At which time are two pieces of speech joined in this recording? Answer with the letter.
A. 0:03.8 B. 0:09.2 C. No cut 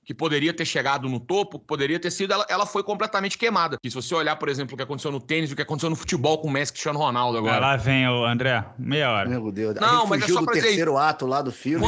A